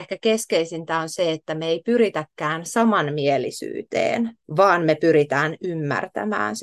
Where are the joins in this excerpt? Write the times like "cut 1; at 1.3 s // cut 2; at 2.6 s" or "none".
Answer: cut 1; at 4.4 s